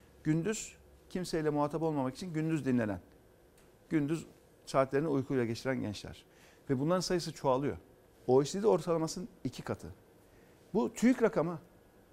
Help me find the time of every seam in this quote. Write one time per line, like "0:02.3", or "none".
0:08.1